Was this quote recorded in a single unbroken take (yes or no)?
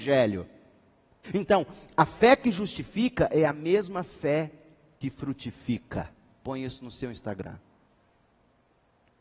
no